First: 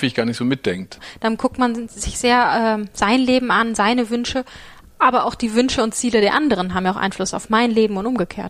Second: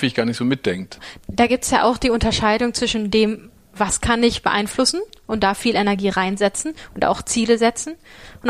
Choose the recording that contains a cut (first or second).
second